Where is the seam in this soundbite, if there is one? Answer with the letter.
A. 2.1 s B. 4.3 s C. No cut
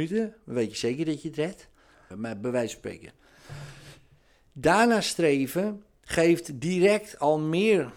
A